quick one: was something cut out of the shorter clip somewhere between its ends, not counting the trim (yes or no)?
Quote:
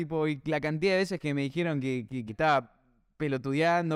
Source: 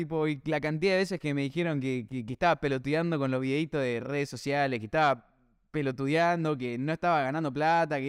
yes